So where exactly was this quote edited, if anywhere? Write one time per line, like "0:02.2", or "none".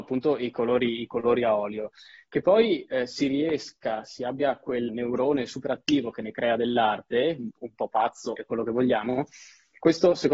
0:04.9
0:08.4

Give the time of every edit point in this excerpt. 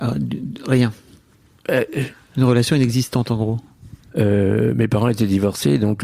0:04.1

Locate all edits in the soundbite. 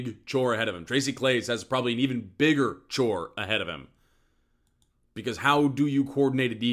none

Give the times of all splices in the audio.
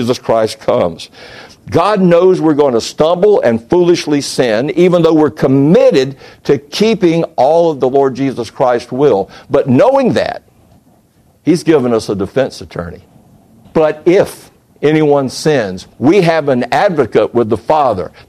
0:13.6
0:15.9

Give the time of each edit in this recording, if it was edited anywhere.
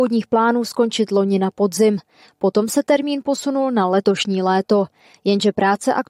none

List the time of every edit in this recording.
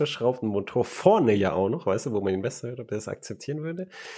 none

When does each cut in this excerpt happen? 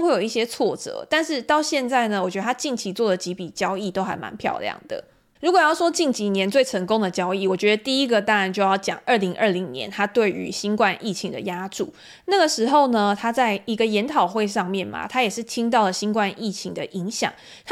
none

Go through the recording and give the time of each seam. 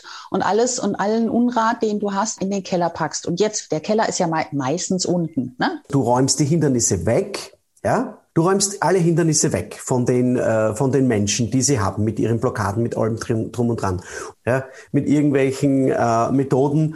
0:05.8
0:14.3

